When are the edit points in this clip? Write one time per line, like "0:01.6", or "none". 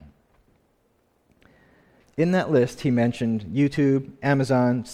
0:02.0